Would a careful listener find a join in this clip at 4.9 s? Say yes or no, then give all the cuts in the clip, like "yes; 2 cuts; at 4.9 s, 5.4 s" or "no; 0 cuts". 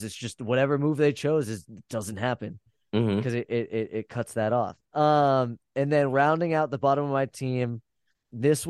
yes; 1 cut; at 4.9 s